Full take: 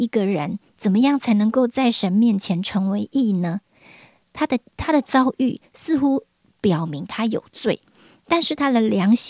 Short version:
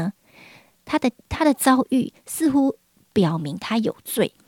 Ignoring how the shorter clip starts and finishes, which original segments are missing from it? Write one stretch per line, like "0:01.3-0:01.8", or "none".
none